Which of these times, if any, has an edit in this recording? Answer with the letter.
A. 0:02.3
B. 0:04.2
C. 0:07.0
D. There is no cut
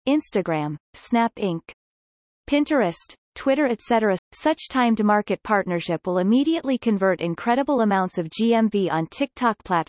B